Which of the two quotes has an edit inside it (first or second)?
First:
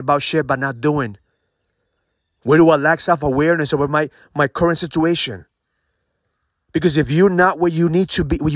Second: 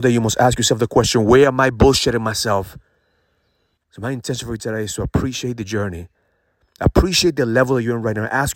second